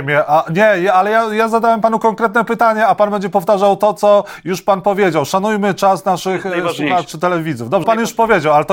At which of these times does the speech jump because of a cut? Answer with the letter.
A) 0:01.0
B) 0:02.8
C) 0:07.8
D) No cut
C